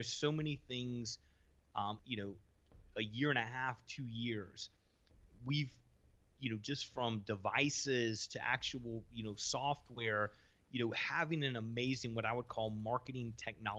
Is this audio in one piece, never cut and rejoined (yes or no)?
no